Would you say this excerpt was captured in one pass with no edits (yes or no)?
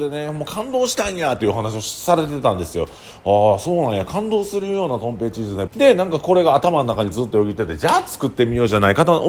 no